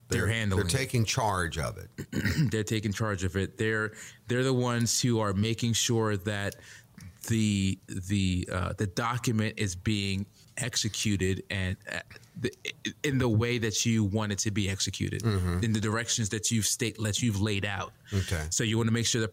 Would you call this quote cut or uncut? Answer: uncut